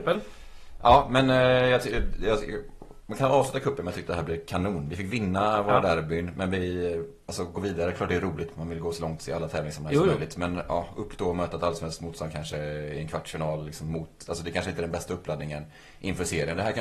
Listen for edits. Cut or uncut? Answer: uncut